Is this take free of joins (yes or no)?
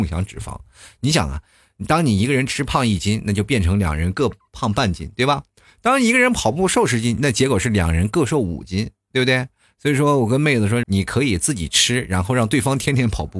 no